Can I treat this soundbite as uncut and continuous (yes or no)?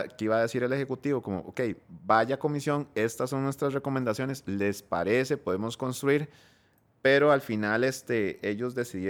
yes